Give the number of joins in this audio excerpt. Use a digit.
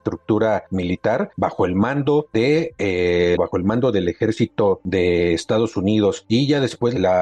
1